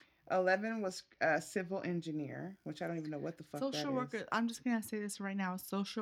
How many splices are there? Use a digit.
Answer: 0